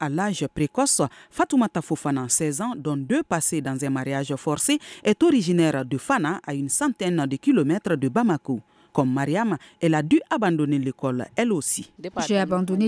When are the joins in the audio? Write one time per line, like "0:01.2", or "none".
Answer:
none